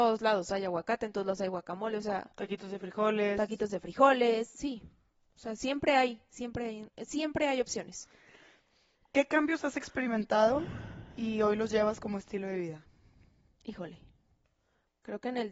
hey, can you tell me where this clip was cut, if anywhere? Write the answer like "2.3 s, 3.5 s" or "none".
none